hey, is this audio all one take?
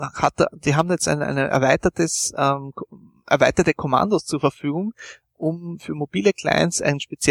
yes; 0 cuts

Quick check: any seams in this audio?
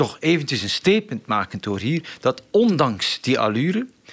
no; 0 cuts

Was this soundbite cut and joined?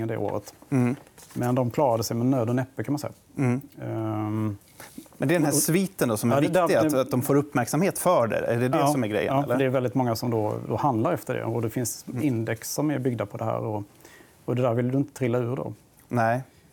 no; 0 cuts

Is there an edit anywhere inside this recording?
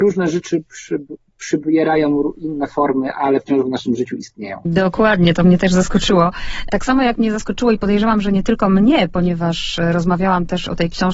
no; 0 cuts

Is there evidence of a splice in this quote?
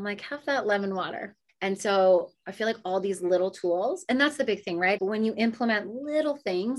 yes; 2 cuts; at 1.5 s, 5.0 s

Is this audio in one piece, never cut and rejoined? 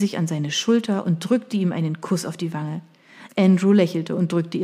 no; 1 cut; at 3.3 s

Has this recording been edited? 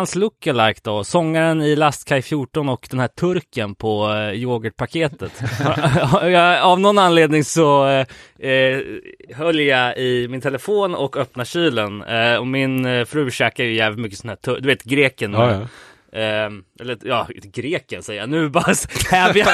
no; 0 cuts

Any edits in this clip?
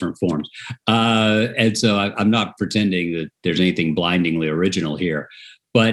no; 0 cuts

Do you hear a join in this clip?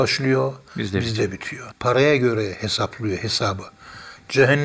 yes; 1 cut; at 1.7 s

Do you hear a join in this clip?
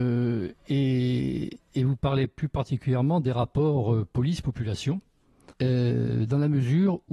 yes; 1 cut; at 5.5 s

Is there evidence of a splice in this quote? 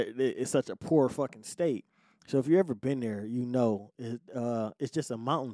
no; 0 cuts

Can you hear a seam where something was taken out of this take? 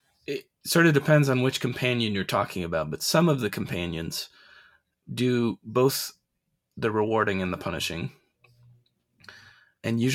no; 0 cuts

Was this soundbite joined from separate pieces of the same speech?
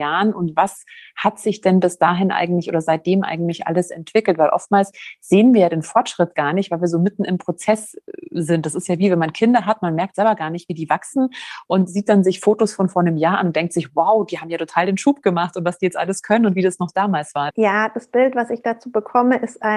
yes; 1 cut; at 17.5 s

